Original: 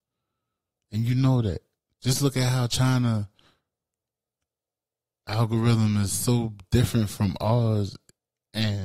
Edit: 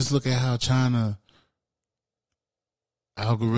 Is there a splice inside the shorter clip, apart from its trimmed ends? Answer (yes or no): no